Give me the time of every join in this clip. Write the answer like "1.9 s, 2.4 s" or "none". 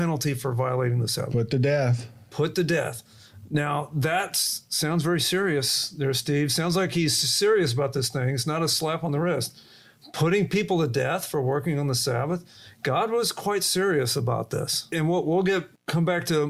none